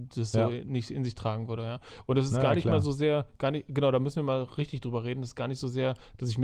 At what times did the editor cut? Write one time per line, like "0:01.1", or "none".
none